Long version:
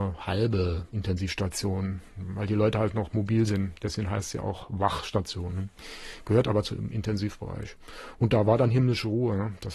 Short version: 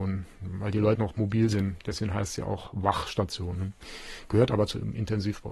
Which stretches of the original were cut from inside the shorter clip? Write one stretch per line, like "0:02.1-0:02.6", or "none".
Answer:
0:02.7-0:02.9